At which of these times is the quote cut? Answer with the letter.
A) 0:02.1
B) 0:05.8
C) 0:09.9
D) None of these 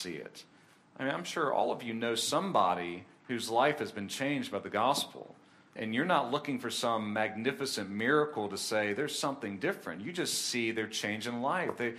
B